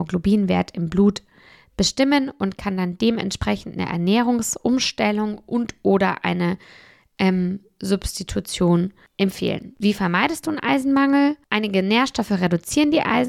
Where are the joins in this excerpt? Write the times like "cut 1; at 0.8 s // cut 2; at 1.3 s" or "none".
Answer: none

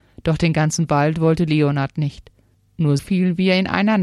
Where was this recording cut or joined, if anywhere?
cut 1; at 3.0 s

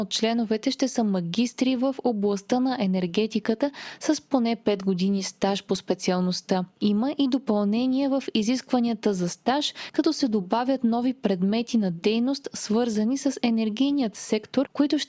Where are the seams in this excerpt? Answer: none

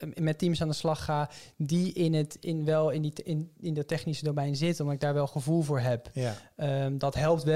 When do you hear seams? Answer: none

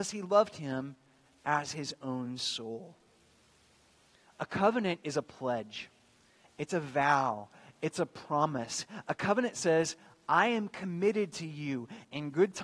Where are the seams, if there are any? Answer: none

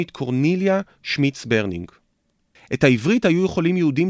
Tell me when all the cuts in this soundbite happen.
cut 1; at 2.6 s

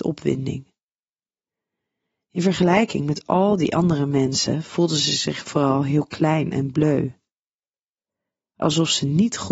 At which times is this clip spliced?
none

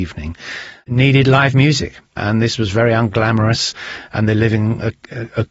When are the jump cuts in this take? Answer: cut 1; at 2.2 s

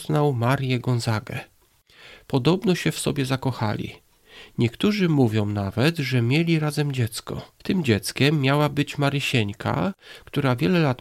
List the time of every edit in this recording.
cut 1; at 7.6 s

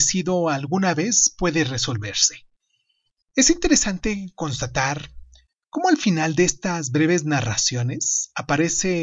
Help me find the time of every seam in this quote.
cut 1; at 3.2 s

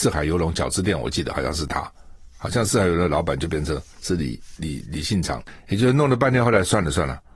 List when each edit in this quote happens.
none

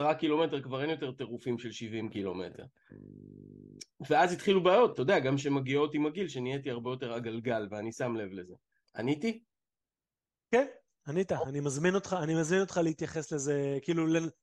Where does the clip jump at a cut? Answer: cut 1; at 8.8 s

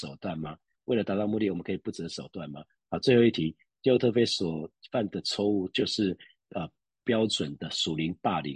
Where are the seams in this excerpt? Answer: cut 1; at 2.8 s

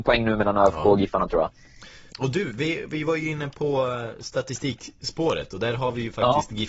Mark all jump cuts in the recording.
cut 1; at 2.1 s

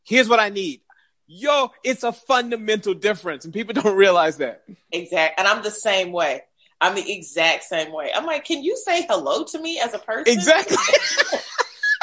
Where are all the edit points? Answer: none

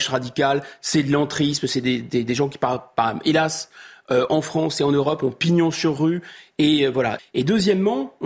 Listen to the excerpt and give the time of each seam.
cut 1; at 7.2 s

